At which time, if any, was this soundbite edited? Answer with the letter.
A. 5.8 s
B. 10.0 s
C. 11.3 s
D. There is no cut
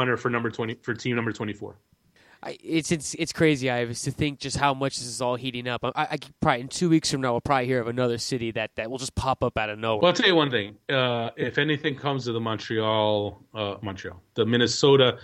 D